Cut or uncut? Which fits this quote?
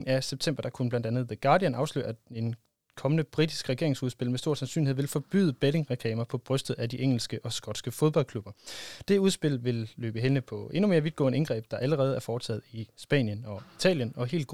uncut